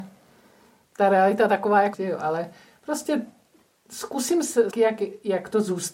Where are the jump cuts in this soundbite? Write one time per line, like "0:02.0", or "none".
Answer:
0:01.9
0:04.7

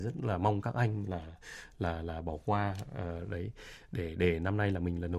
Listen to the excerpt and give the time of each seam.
none

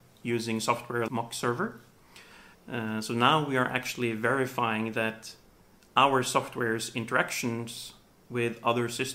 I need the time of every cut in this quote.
0:01.1
0:02.5

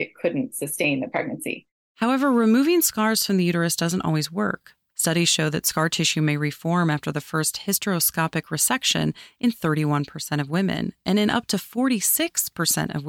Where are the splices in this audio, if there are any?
none

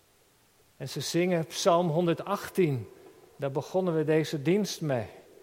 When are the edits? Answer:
0:03.3

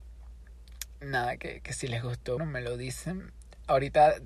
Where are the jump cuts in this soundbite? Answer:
0:02.4

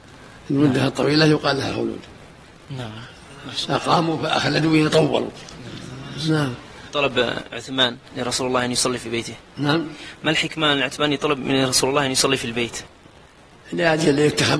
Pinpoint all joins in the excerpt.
none

